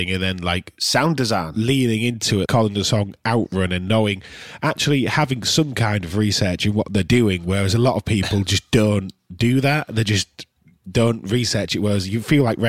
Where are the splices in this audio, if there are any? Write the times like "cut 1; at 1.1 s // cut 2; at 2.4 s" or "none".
cut 1; at 2.5 s